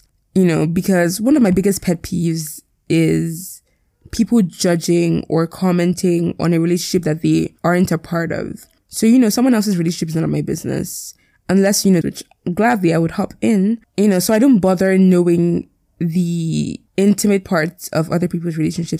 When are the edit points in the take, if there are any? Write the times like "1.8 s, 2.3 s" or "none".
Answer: 12.0 s, 16.9 s